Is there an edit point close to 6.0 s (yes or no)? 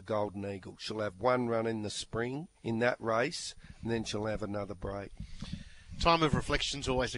no